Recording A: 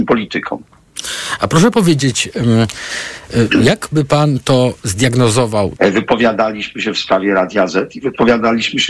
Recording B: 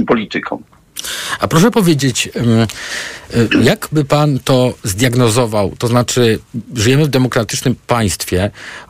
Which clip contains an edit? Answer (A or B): A